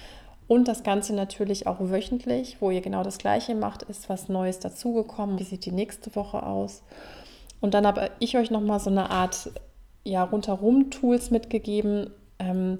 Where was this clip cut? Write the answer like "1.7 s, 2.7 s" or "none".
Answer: 5.4 s